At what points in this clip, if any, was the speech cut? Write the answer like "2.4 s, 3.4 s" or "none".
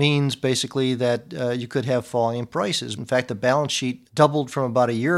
2.9 s, 4.1 s